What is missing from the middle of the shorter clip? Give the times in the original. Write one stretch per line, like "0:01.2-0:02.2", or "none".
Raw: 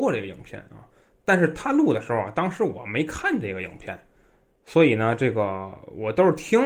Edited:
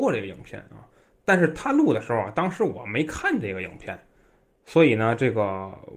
none